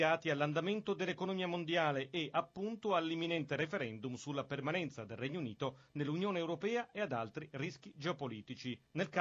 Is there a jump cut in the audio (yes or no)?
no